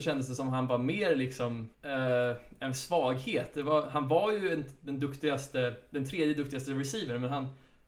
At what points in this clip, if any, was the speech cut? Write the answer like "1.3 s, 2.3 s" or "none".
1.7 s